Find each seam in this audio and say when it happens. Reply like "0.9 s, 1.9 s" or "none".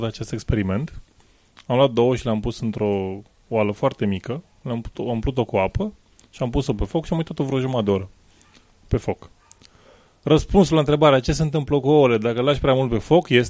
none

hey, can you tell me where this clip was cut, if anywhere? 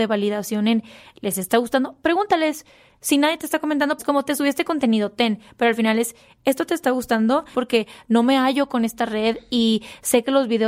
4.0 s, 7.5 s

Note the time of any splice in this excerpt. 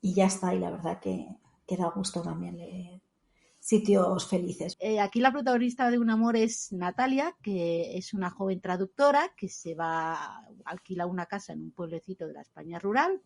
4.7 s

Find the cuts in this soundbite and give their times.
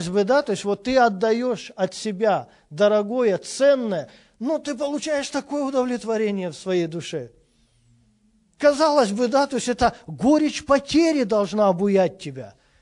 none

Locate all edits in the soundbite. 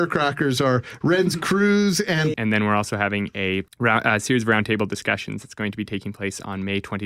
2.3 s, 3.7 s

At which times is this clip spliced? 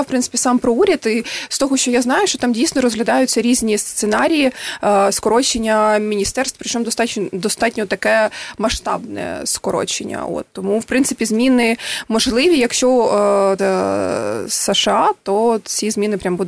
13.6 s

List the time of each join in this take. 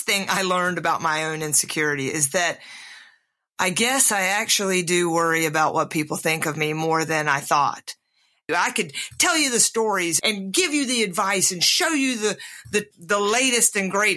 8.5 s, 10.2 s, 12.9 s

